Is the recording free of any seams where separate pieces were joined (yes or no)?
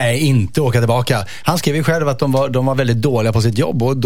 yes